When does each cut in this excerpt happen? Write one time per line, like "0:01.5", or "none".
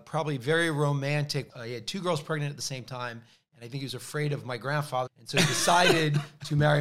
0:01.5
0:05.1

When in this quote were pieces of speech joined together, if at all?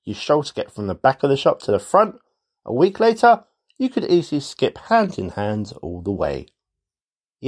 none

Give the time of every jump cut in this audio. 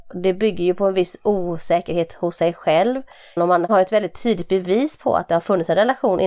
0:03.4

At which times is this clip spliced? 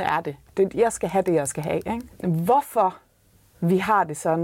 0:02.1

